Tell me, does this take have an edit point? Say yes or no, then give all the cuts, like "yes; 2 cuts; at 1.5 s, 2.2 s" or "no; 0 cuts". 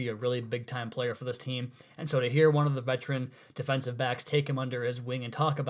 no; 0 cuts